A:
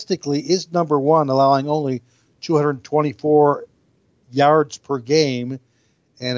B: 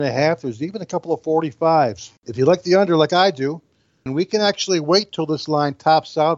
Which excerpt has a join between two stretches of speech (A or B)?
B